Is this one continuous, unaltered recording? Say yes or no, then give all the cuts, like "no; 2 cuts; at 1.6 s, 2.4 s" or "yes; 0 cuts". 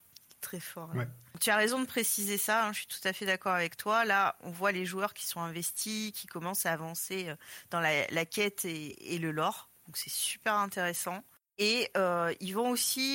no; 1 cut; at 4.4 s